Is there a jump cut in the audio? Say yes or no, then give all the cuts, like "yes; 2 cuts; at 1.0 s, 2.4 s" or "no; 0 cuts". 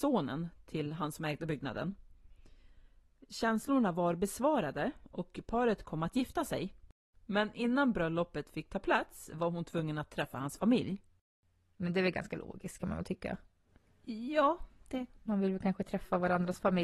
no; 0 cuts